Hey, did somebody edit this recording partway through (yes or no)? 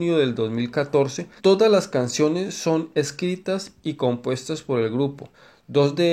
yes